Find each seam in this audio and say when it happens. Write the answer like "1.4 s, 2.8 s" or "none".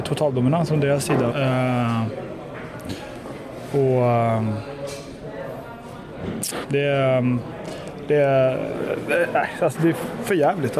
1.3 s, 6.6 s